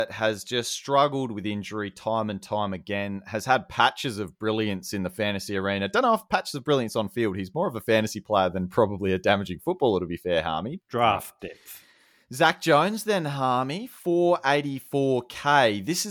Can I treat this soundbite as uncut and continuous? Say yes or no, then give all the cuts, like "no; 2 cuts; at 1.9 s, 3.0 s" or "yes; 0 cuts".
no; 1 cut; at 10.8 s